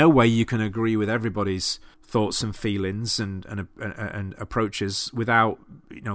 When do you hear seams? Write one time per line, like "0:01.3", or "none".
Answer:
0:01.9